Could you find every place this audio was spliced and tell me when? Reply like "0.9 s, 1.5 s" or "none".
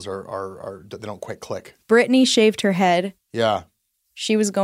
none